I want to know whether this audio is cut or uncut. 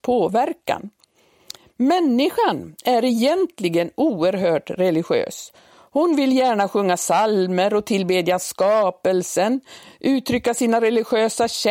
uncut